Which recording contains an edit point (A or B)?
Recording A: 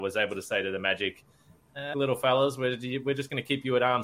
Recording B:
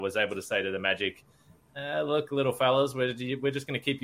A